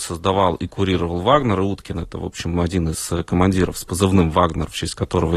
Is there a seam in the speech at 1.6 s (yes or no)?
no